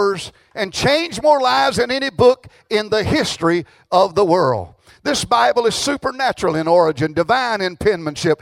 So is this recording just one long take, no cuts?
yes; 0 cuts

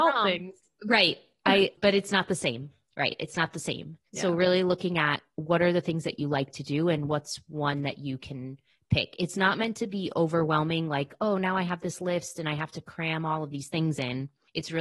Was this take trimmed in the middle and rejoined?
yes; 2 cuts; at 1.7 s, 4.1 s

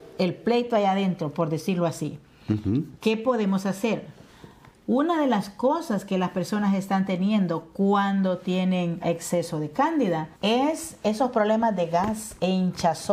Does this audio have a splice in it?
yes; 2 cuts; at 9.0 s, 10.3 s

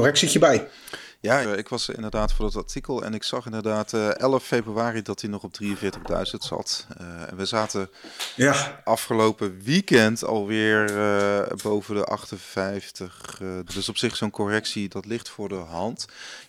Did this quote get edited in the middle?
yes; 3 cuts; at 1.4 s, 13.7 s, 14.9 s

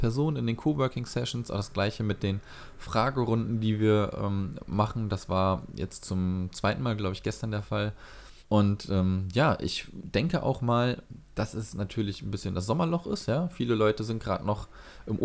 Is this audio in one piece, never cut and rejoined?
no; 1 cut; at 8.4 s

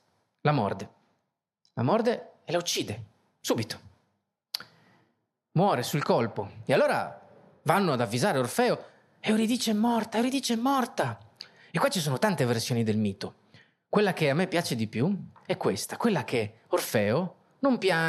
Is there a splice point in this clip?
no; 0 cuts

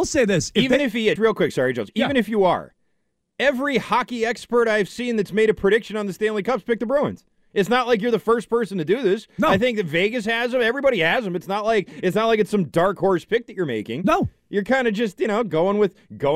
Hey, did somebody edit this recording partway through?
yes; 1 cut; at 1.2 s

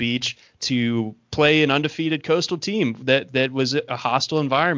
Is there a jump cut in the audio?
no; 0 cuts

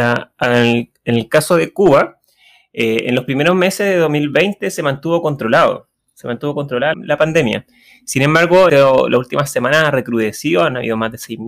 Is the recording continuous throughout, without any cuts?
no; 2 cuts; at 6.9 s, 8.7 s

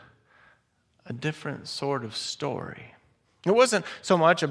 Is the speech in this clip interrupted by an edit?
no; 0 cuts

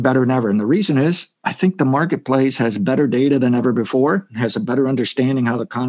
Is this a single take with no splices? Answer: yes; 0 cuts

